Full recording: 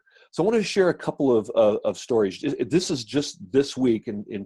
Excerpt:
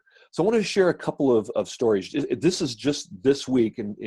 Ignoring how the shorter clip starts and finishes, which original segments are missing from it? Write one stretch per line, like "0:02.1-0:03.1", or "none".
0:01.5-0:01.8